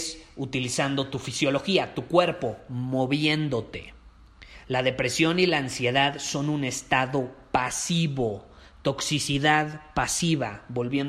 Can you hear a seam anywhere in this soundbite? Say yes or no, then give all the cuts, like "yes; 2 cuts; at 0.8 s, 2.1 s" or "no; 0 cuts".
no; 0 cuts